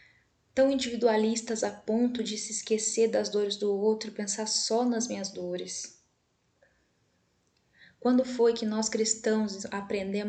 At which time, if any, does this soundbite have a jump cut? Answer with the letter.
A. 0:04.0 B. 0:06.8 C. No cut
C